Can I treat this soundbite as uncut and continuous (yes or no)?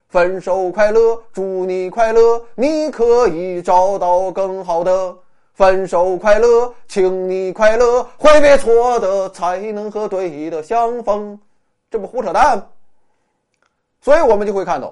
yes